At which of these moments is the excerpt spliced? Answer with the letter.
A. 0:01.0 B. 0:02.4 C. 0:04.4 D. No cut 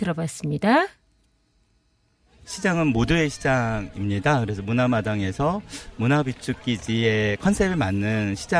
D